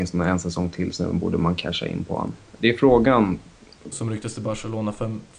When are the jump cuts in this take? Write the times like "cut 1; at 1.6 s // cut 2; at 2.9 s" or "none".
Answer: cut 1; at 2.6 s // cut 2; at 3.9 s